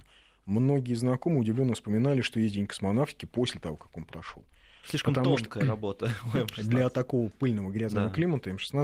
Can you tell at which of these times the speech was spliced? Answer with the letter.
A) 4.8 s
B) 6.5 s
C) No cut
A